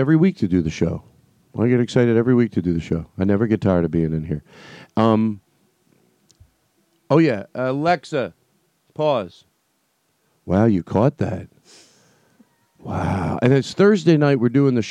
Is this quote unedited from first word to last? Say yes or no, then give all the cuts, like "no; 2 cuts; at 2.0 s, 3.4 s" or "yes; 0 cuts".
yes; 0 cuts